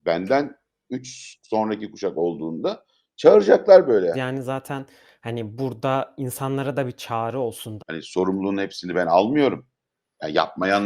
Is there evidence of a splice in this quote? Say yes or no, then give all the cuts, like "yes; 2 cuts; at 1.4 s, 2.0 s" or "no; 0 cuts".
yes; 2 cuts; at 4.1 s, 7.8 s